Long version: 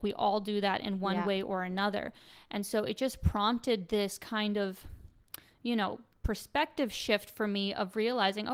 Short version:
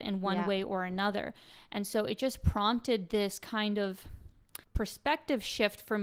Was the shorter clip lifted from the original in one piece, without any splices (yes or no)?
no